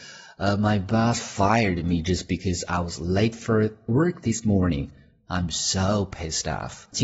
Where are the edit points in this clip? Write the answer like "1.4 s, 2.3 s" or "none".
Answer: none